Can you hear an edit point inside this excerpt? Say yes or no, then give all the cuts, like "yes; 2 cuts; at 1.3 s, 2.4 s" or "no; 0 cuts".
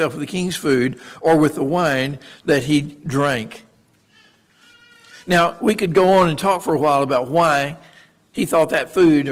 no; 0 cuts